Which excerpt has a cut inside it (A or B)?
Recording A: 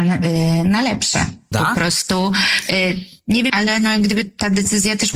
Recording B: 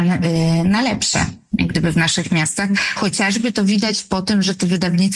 A